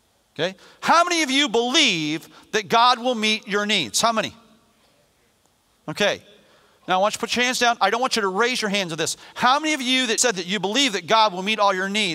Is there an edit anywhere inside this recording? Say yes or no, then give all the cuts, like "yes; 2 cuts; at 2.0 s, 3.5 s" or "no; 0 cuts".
yes; 1 cut; at 10.2 s